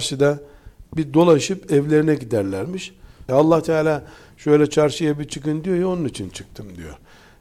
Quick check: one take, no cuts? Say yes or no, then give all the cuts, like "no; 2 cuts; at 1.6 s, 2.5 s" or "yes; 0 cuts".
no; 1 cut; at 3.3 s